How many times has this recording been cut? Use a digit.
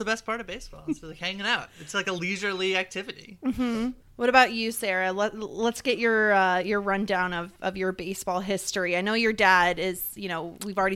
1